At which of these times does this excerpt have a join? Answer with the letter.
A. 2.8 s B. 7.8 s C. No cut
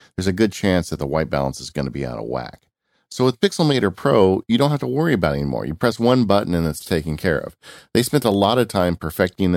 C